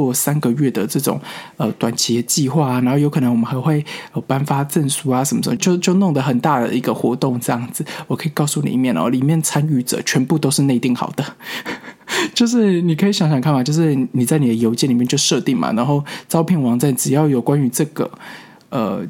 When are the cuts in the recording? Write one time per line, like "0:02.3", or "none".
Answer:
0:05.6